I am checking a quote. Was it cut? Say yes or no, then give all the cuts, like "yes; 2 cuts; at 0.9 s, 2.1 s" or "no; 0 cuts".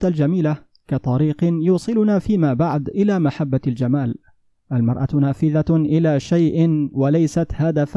no; 0 cuts